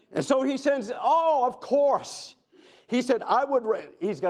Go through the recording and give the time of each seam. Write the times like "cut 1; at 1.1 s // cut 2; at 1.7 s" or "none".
none